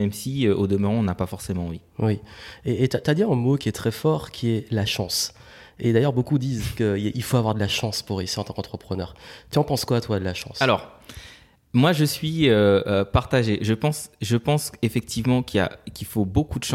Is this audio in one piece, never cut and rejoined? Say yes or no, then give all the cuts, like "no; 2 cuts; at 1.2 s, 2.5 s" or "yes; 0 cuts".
yes; 0 cuts